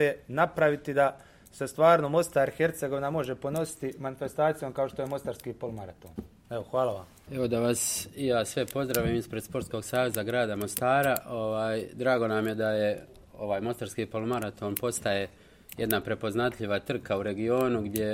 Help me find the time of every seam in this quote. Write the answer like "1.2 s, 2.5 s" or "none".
7.3 s